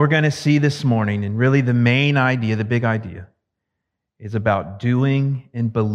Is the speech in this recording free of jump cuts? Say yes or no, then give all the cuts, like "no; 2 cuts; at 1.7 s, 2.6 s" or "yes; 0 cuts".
yes; 0 cuts